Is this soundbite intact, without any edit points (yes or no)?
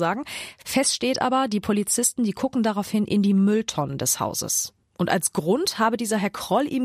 no